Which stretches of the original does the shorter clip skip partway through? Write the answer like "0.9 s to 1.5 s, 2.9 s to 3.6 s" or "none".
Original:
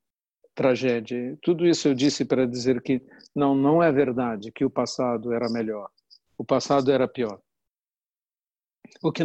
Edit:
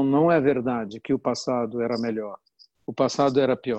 none